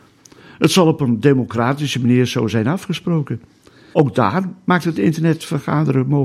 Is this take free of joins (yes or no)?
no